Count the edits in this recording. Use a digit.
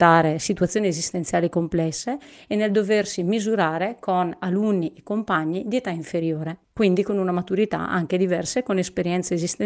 1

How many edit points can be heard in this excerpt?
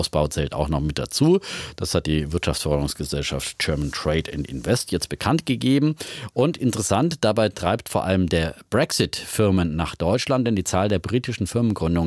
0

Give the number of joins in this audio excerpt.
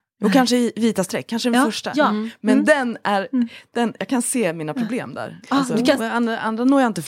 1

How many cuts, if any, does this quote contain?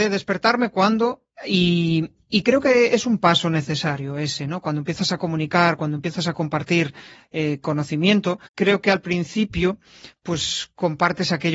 2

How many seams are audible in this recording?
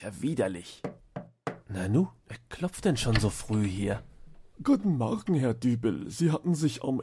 0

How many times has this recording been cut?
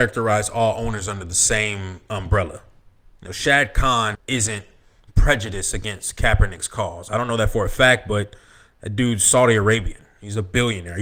1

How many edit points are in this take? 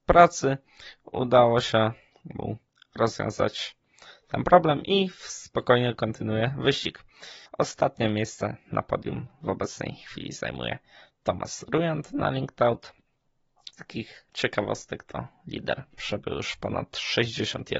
2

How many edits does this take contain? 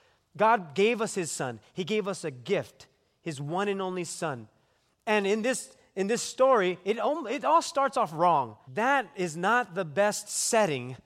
1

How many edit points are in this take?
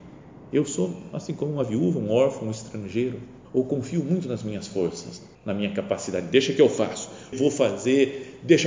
3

